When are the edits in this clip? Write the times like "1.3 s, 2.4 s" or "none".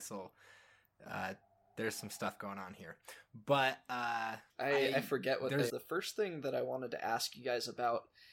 4.5 s, 5.7 s